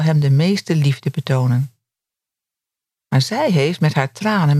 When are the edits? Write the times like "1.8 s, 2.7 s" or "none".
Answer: 2.9 s